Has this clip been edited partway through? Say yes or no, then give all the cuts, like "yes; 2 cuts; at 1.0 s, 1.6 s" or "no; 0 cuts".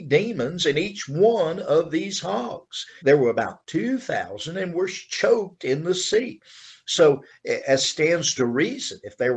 yes; 1 cut; at 3.0 s